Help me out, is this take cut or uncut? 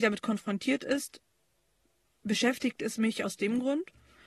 uncut